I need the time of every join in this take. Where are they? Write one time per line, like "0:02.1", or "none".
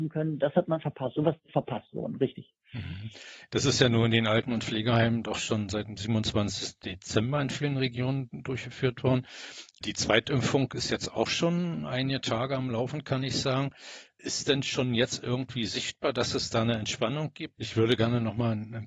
0:03.5
0:17.5